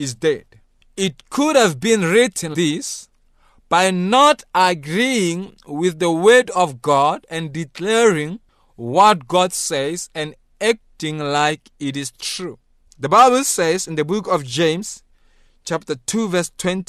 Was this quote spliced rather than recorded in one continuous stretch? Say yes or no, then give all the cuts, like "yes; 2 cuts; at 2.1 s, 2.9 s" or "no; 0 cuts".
yes; 2 cuts; at 2.5 s, 12.9 s